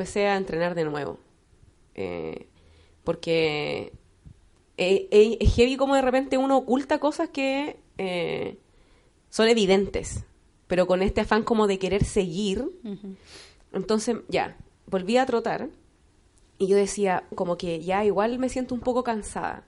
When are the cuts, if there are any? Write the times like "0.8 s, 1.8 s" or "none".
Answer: 17.3 s